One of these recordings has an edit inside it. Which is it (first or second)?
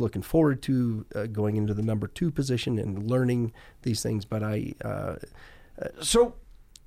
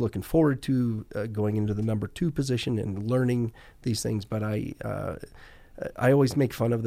first